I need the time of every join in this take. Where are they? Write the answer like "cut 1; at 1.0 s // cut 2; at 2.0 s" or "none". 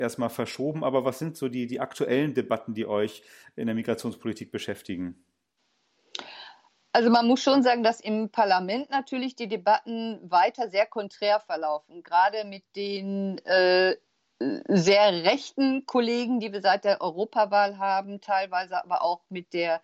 none